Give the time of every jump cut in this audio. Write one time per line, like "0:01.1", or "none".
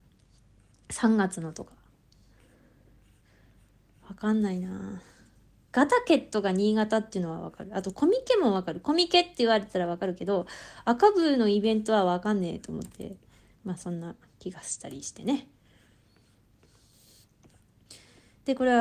0:13.5

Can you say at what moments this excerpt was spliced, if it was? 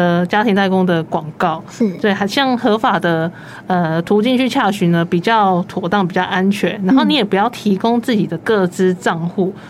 none

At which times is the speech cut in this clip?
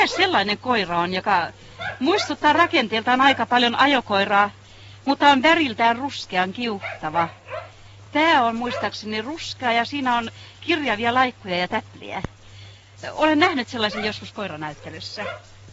none

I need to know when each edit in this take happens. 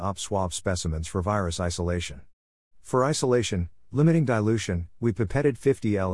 0:04.9

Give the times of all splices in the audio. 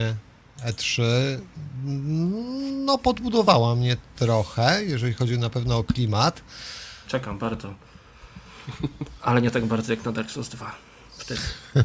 0:07.0

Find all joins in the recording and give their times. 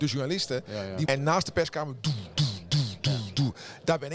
0:01.1

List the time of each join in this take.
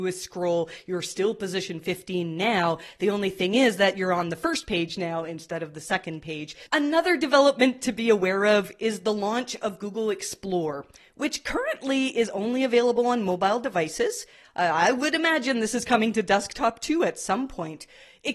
0:06.7

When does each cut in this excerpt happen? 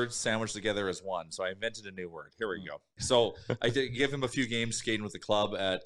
0:03.0

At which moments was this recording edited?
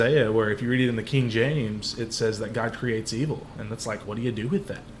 0:04.0

